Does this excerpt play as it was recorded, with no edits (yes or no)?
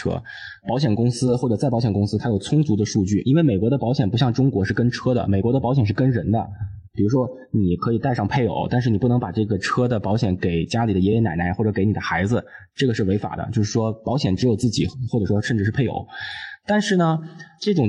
yes